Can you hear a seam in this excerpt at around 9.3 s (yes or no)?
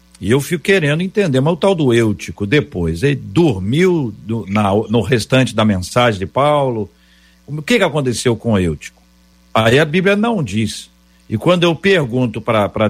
no